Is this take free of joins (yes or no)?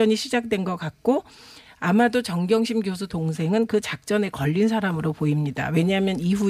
yes